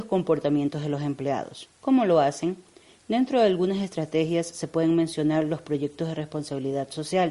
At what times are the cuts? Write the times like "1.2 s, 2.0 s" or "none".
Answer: none